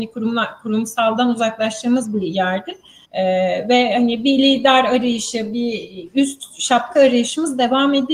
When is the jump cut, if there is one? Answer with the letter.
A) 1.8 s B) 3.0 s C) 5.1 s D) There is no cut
B